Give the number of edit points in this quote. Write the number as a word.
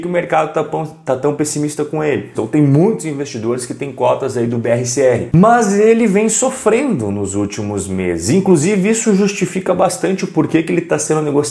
one